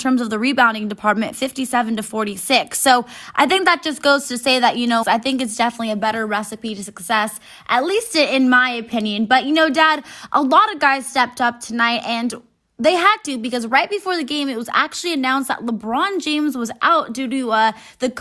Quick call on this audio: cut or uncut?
cut